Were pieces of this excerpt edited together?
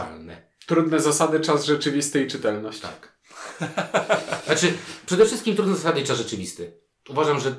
no; 0 cuts

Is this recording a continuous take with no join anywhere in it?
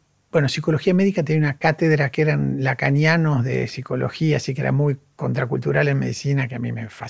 yes; 0 cuts

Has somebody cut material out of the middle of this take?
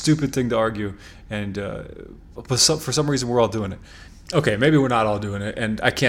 no; 0 cuts

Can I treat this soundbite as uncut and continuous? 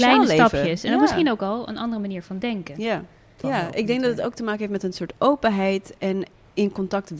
no; 1 cut; at 3.4 s

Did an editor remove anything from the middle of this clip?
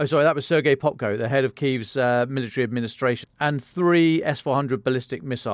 yes; 1 cut; at 3.2 s

